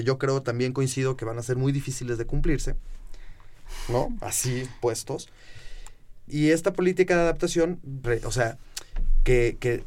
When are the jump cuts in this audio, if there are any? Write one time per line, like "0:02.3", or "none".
0:06.3
0:08.0